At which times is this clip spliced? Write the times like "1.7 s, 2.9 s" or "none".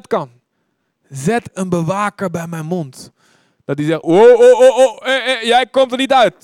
4.0 s